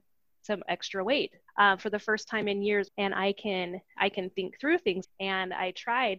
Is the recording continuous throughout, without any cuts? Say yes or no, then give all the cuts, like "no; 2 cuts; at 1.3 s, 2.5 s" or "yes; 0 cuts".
no; 3 cuts; at 1.5 s, 2.9 s, 5.0 s